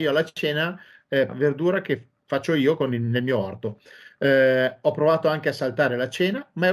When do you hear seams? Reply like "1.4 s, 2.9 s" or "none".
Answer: 1.3 s